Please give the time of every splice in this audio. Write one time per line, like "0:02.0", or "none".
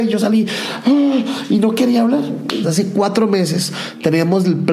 0:02.6